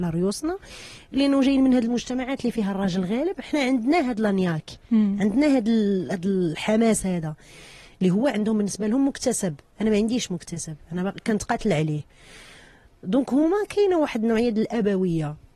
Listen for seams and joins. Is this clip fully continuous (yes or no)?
yes